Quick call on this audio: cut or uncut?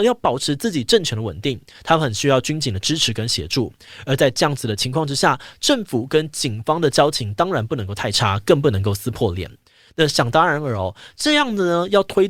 uncut